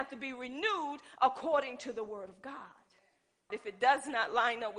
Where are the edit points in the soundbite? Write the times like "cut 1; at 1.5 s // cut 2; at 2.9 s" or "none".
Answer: cut 1; at 3.5 s